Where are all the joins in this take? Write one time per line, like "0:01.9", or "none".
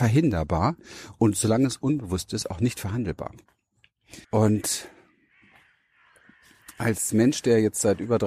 0:04.2